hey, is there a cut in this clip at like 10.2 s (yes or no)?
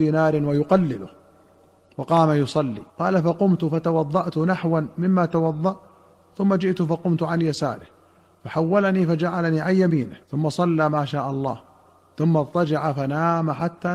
yes